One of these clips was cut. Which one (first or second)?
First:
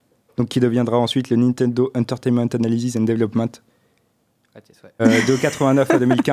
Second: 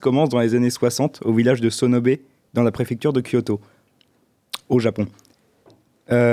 first